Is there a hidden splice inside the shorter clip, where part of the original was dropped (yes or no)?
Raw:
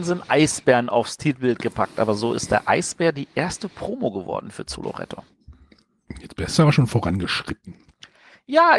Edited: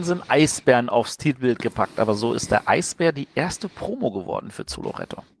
no